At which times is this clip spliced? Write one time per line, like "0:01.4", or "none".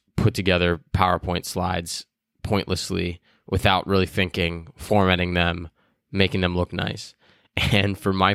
none